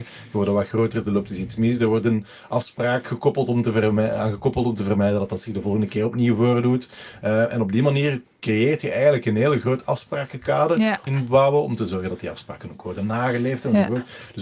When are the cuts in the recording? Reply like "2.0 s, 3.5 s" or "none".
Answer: 11.1 s